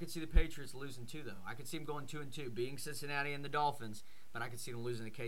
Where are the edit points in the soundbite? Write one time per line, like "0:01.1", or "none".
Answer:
none